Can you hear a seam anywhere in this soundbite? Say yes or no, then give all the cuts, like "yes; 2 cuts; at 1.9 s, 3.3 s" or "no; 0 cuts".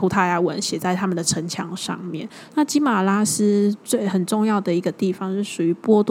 yes; 1 cut; at 2.5 s